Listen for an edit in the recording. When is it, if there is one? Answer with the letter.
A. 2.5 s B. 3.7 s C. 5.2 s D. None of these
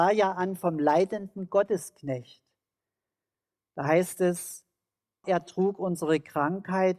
C